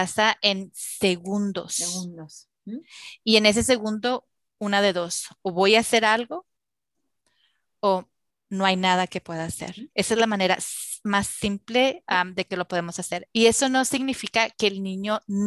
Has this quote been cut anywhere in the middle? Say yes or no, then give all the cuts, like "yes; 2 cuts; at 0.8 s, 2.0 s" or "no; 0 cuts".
no; 0 cuts